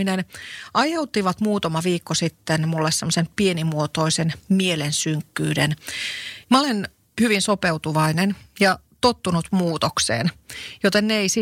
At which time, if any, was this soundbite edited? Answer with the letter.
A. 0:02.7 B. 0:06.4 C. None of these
B